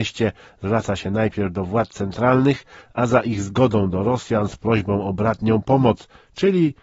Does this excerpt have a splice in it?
no; 0 cuts

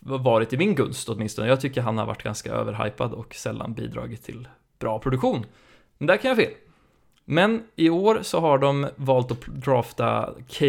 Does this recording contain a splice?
no; 0 cuts

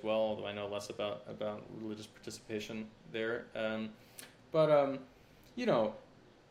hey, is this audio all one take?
yes; 0 cuts

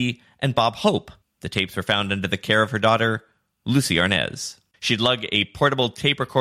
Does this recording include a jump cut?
yes; 2 cuts; at 1.2 s, 4.7 s

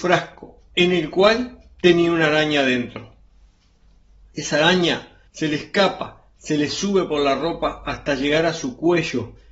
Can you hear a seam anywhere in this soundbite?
yes; 1 cut; at 5.3 s

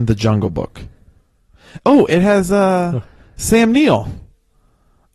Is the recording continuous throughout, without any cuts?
yes; 0 cuts

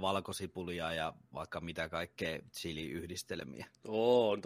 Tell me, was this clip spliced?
no; 0 cuts

